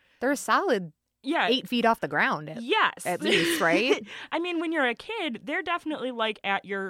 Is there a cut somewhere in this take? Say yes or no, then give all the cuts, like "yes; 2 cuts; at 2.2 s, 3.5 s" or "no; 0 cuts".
no; 0 cuts